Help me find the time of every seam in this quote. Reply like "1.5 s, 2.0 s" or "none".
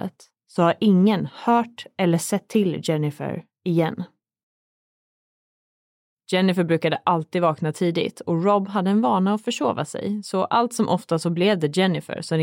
6.2 s